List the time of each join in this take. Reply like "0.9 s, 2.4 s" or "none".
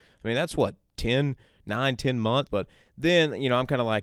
2.5 s

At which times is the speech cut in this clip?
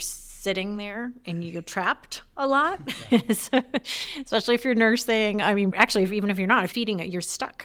5.7 s, 6.7 s

